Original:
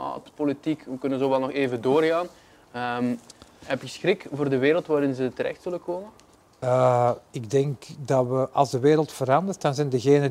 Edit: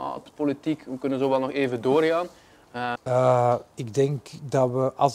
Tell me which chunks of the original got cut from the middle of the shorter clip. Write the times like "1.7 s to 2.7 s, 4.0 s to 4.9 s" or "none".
3.0 s to 6.5 s